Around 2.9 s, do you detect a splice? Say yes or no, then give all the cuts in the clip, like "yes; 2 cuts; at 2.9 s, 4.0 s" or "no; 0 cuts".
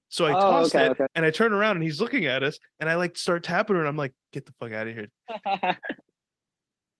no; 2 cuts; at 1.1 s, 5.1 s